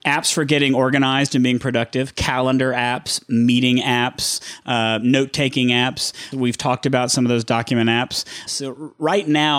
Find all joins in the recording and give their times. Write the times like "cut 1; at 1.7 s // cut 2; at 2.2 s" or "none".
cut 1; at 6.3 s // cut 2; at 8.5 s